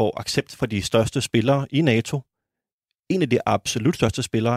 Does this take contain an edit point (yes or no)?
no